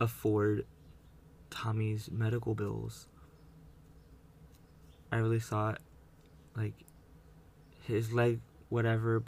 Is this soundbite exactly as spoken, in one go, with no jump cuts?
no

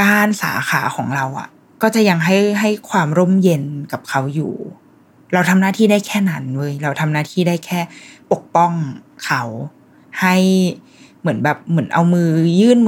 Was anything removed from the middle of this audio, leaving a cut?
no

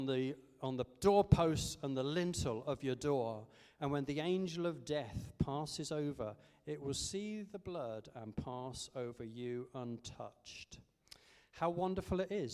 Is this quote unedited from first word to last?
yes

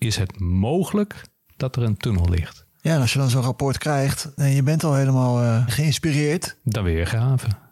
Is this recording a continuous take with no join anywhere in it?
no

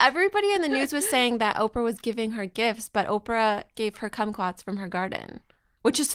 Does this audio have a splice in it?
yes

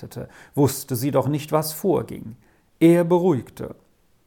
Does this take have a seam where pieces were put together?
no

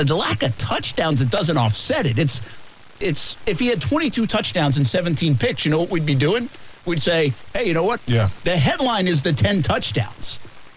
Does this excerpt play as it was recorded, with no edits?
no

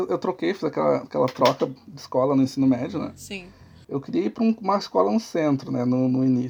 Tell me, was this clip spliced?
yes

